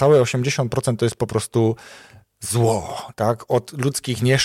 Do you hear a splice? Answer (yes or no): no